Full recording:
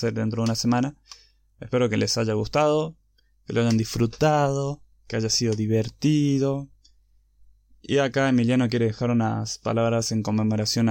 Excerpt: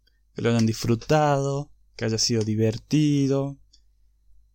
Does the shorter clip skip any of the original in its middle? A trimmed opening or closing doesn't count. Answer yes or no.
no